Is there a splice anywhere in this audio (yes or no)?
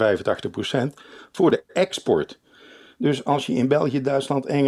no